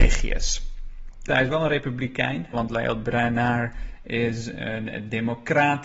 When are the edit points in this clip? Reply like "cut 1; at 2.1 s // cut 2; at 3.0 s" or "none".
cut 1; at 1.3 s // cut 2; at 2.5 s